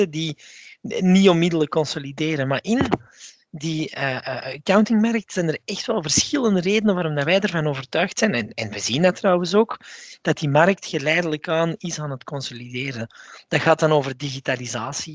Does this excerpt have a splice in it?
no; 0 cuts

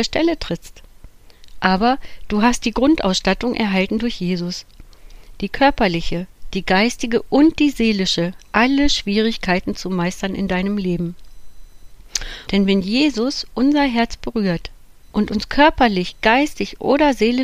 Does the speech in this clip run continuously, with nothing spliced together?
no; 2 cuts; at 12.5 s, 15.1 s

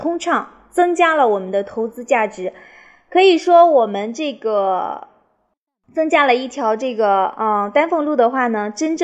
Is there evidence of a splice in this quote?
no; 0 cuts

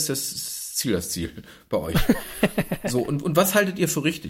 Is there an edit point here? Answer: no; 0 cuts

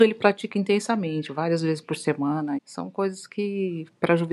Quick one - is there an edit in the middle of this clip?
yes; 1 cut; at 2.6 s

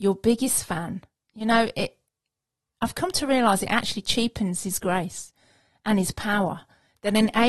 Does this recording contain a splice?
no; 0 cuts

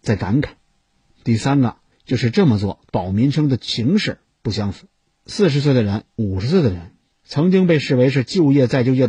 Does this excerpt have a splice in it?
yes; 1 cut; at 2.9 s

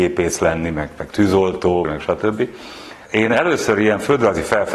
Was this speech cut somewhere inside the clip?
yes; 1 cut; at 1.8 s

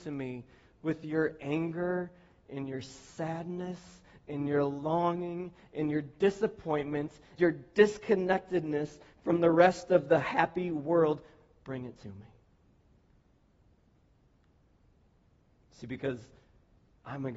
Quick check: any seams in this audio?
yes; 1 cut; at 7.4 s

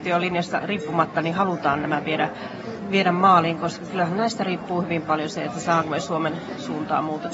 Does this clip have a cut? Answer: no; 0 cuts

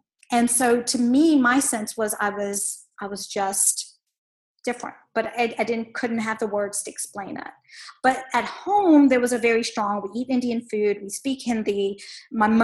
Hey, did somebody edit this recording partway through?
no; 0 cuts

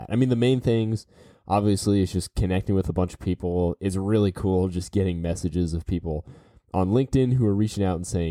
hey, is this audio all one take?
yes; 0 cuts

